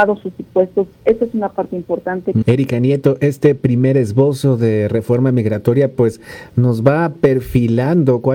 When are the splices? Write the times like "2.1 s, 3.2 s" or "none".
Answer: 2.4 s